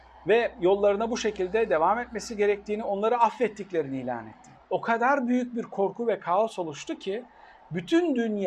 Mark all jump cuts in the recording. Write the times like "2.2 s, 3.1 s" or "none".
4.5 s